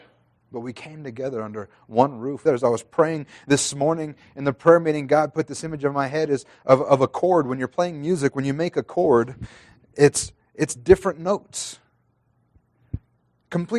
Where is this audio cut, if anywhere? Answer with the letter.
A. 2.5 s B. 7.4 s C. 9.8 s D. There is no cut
A